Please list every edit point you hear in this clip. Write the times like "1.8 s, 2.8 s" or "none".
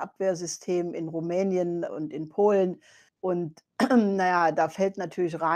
3.1 s